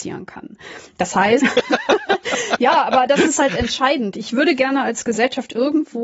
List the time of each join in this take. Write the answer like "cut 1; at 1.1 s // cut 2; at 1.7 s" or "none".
cut 1; at 1.4 s